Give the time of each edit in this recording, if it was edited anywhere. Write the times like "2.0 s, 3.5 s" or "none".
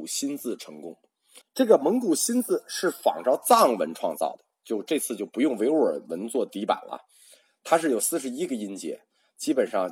1.4 s